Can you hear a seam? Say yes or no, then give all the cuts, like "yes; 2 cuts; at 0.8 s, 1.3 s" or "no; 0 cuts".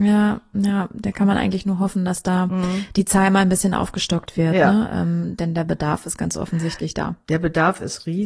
no; 0 cuts